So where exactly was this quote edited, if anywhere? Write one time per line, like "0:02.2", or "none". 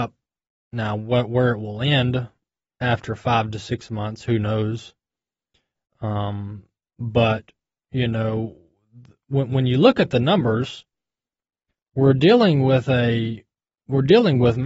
none